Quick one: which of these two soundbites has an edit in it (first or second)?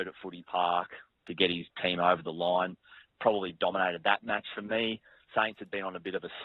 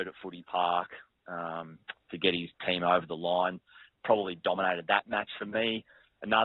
first